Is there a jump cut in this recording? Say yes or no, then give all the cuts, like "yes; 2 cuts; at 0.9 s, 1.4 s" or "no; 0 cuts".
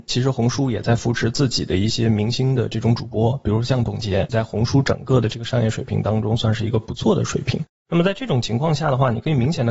yes; 1 cut; at 4.3 s